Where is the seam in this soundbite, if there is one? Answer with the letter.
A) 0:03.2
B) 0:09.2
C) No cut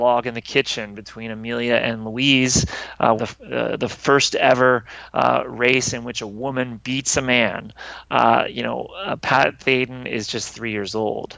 A